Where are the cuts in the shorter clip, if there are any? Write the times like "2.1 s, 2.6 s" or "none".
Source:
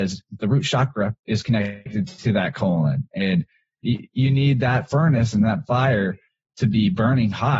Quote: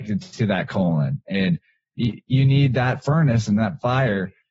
none